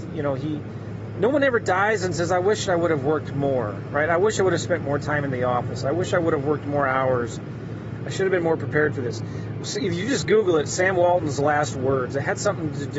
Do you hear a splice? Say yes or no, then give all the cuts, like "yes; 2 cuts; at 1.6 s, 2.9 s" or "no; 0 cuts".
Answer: yes; 1 cut; at 8.0 s